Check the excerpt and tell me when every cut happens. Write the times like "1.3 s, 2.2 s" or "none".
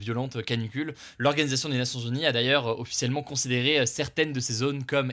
1.1 s